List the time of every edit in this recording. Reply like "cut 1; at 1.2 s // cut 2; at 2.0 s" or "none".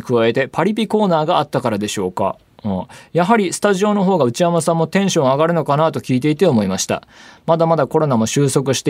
none